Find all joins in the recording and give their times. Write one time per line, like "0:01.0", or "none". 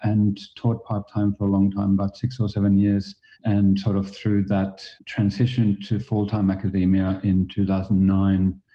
0:03.3
0:05.0